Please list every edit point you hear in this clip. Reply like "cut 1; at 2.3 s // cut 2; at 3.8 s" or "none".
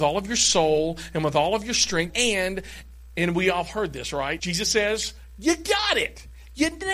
cut 1; at 2.1 s // cut 2; at 4.4 s